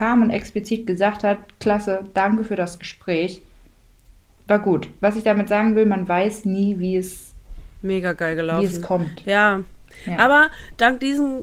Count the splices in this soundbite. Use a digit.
0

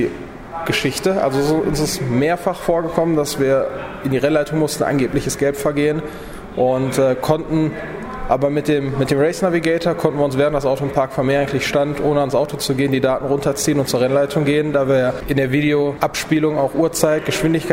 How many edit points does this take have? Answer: 0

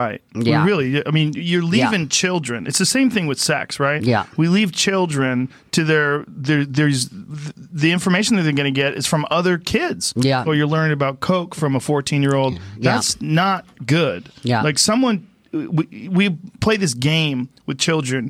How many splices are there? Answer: 1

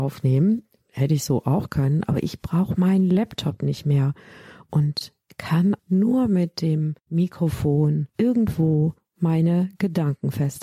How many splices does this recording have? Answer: 2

